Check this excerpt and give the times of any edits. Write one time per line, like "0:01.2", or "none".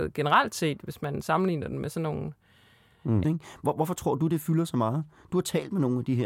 0:03.2